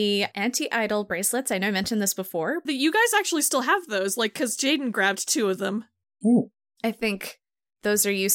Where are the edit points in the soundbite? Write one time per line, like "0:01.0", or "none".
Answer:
0:02.7
0:06.0

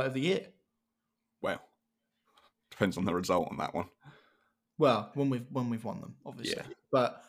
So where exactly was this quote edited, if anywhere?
0:05.1

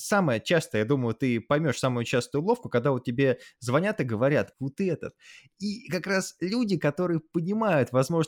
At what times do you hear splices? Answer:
0:04.5

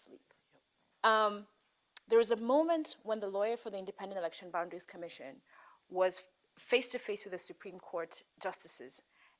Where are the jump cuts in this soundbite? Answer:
0:00.9

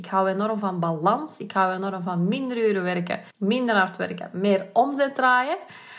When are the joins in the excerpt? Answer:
0:03.3

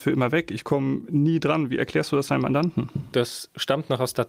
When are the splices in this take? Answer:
0:03.1

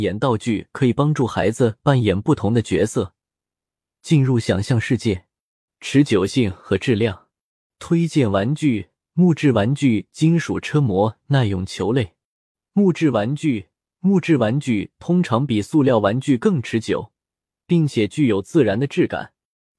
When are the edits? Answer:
0:05.7

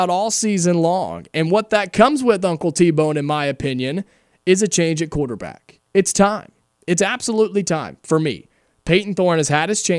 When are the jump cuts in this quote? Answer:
0:05.9

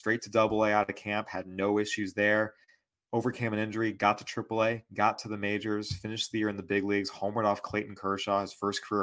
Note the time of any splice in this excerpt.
none

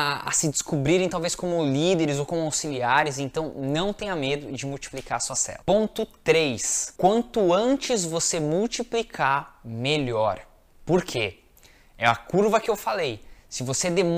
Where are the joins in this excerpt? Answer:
none

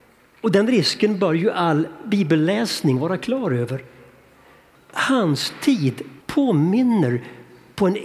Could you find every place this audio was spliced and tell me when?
0:04.8
0:06.2

